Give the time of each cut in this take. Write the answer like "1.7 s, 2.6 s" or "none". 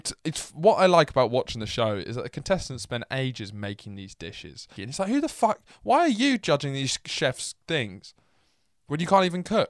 4.8 s